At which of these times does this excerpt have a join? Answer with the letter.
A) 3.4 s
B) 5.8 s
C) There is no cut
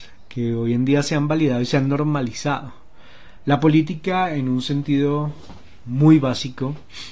A